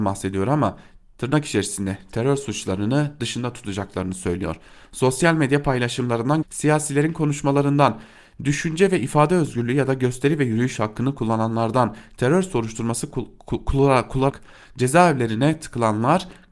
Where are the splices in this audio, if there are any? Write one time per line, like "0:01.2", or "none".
0:06.4
0:14.3